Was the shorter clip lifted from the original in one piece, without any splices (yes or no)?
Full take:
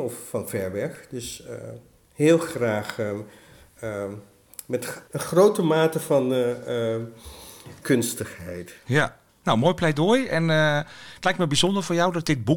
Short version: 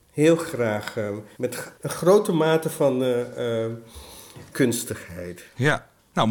no